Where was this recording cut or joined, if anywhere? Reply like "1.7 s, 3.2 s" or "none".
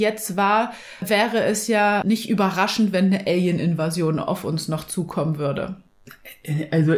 none